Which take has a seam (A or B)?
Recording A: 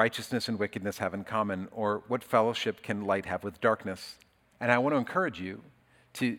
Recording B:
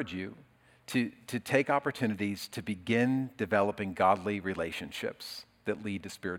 A